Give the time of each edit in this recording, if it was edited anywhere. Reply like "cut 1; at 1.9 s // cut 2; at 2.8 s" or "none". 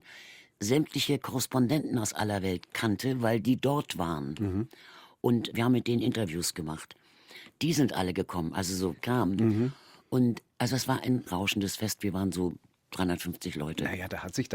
cut 1; at 9.0 s